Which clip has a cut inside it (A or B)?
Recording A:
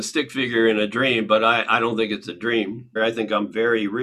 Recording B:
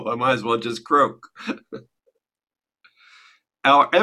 A